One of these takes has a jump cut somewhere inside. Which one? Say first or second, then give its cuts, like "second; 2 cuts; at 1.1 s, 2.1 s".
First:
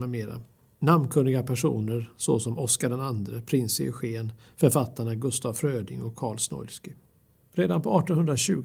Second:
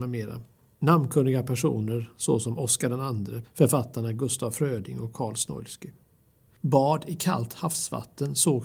second; 2 cuts; at 3.4 s, 6.5 s